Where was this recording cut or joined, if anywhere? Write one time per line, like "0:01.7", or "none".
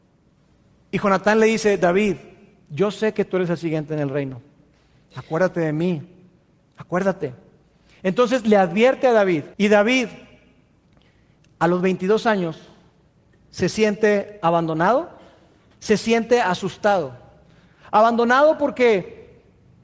0:06.6
0:09.5
0:15.7